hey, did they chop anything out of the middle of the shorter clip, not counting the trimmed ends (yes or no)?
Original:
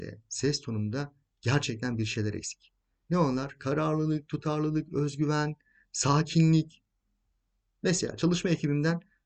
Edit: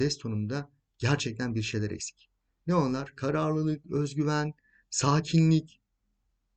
yes